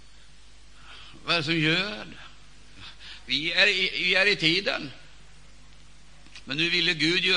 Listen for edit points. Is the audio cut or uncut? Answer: cut